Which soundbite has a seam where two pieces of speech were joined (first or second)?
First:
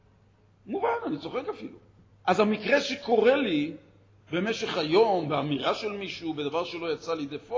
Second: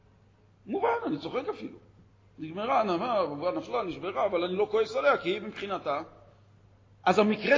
first